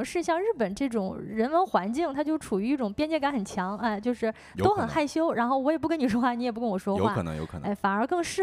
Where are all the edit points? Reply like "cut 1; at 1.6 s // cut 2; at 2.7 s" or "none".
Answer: none